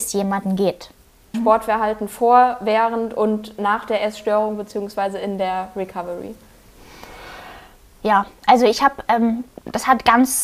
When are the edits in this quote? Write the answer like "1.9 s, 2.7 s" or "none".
1.3 s